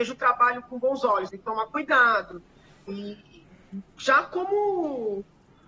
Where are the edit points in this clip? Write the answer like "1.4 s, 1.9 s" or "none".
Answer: 1.3 s, 2.9 s